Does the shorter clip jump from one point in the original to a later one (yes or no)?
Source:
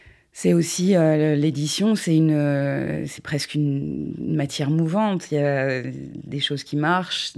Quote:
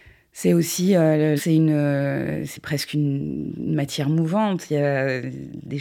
yes